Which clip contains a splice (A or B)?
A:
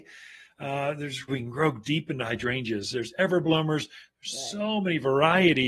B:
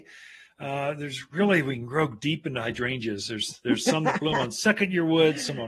A